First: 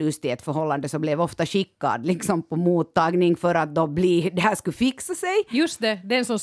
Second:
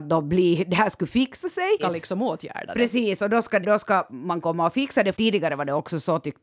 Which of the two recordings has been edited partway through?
second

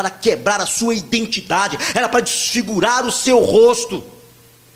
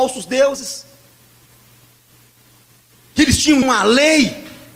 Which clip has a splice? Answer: second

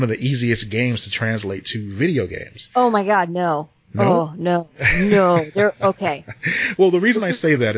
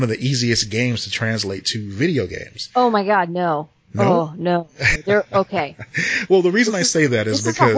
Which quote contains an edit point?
second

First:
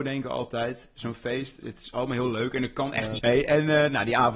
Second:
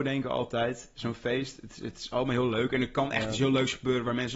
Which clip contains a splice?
first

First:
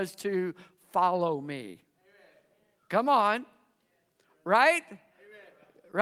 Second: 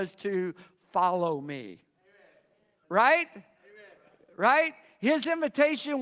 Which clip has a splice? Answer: second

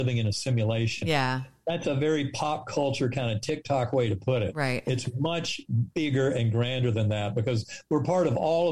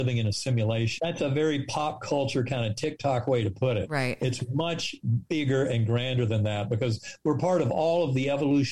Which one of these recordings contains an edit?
second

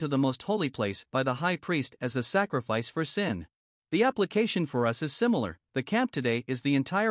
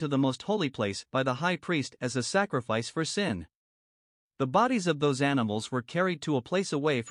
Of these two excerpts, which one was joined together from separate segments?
first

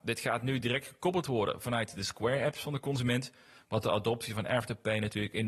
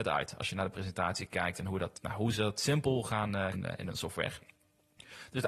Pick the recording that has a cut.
second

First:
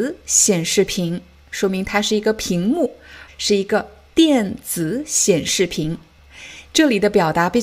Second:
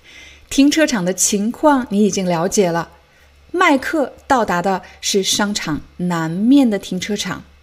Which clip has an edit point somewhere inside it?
first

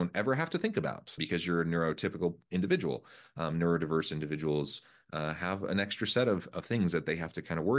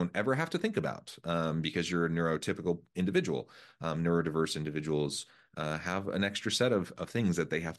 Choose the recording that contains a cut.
first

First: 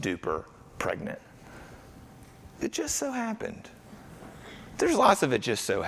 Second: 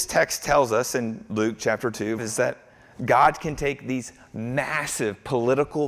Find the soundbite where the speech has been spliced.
second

